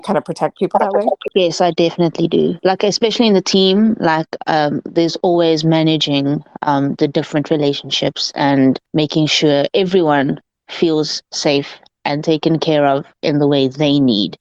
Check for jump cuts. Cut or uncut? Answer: uncut